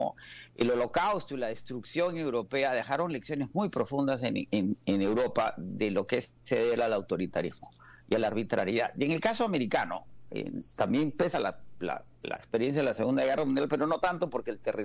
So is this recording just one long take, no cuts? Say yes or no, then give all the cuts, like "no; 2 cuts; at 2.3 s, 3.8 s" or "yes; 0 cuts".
yes; 0 cuts